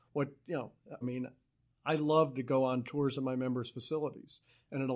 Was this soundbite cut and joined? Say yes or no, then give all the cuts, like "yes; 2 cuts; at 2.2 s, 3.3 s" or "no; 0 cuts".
yes; 1 cut; at 1.0 s